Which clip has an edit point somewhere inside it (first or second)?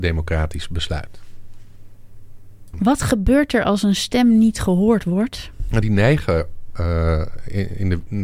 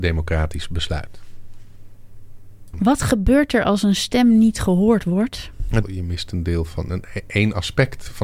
second